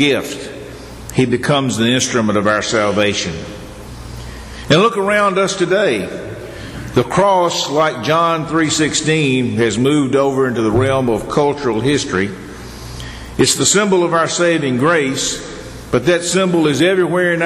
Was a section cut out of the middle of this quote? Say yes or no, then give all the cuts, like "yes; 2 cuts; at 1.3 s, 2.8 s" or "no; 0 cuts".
no; 0 cuts